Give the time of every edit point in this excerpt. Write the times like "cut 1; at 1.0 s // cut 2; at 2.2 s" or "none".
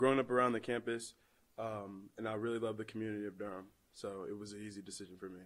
none

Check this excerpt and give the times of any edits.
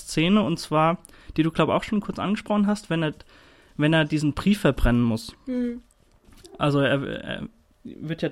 none

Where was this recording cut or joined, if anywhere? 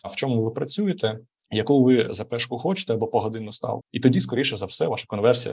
cut 1; at 3.8 s

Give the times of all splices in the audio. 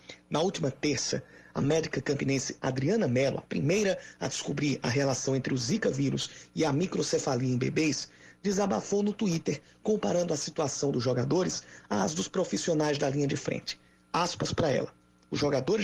none

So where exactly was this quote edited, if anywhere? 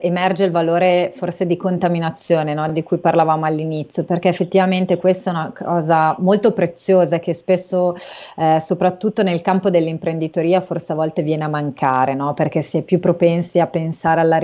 none

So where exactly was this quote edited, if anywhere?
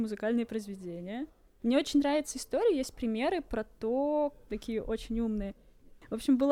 cut 1; at 1.6 s // cut 2; at 4.5 s

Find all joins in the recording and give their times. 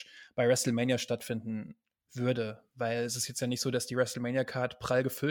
none

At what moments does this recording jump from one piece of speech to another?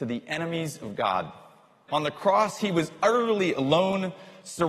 cut 1; at 1.9 s

